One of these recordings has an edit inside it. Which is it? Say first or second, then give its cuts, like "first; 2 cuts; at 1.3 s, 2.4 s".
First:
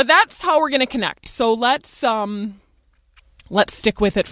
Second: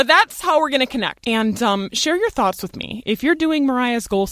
second; 1 cut; at 1.2 s